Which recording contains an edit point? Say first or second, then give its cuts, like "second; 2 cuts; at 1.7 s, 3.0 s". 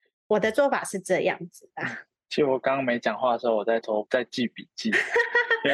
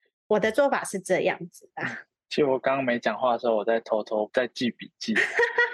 first; 1 cut; at 3.8 s